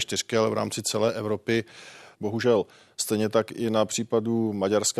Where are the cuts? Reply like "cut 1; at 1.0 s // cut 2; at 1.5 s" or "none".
cut 1; at 2.1 s